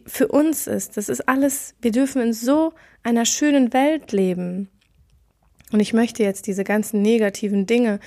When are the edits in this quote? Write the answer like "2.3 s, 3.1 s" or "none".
none